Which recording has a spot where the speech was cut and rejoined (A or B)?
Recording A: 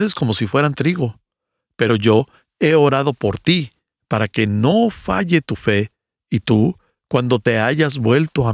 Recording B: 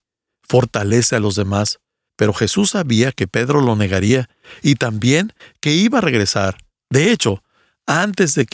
B